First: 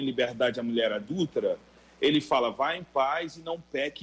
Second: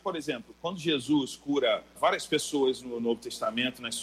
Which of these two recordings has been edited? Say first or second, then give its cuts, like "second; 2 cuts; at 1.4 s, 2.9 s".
second; 1 cut; at 2.0 s